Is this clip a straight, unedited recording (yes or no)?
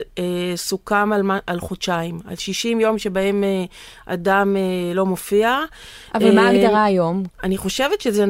no